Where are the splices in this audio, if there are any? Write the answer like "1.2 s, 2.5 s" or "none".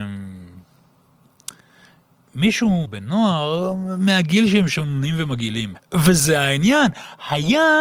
2.9 s, 5.7 s